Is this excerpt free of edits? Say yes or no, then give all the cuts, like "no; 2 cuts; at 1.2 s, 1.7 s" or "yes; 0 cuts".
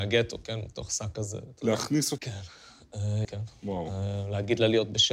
no; 2 cuts; at 2.2 s, 3.2 s